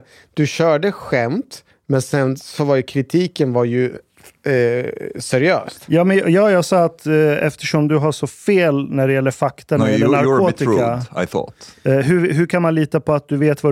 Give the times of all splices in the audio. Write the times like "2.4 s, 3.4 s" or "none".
none